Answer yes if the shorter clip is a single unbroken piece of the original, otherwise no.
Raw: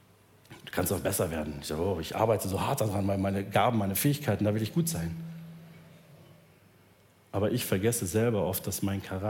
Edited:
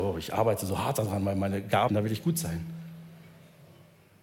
no